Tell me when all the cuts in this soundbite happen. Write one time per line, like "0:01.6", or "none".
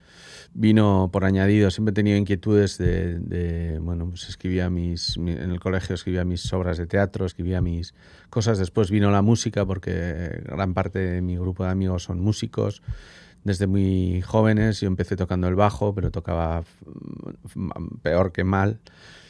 0:07.3